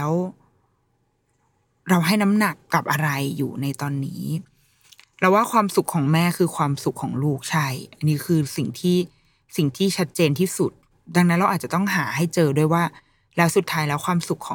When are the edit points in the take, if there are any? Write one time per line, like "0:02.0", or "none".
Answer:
none